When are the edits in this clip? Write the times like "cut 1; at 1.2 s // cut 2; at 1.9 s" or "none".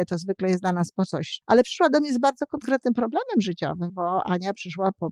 cut 1; at 1.4 s // cut 2; at 3.9 s